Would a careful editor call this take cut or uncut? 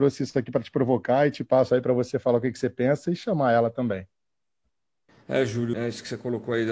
cut